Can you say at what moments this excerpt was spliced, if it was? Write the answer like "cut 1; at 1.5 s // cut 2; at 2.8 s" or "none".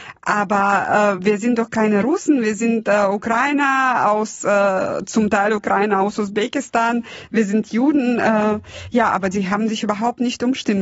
cut 1; at 1.2 s